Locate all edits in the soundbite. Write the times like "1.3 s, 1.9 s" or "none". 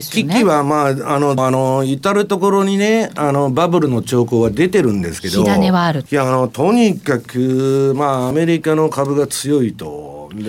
1.4 s, 6.1 s, 8.3 s